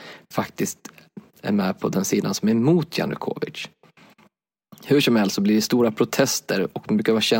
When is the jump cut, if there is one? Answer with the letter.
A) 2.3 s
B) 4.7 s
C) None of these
C